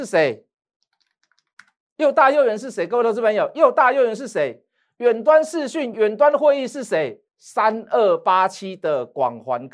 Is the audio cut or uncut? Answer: cut